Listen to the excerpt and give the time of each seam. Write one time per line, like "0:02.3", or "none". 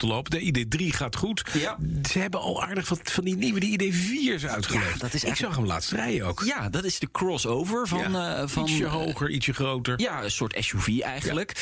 none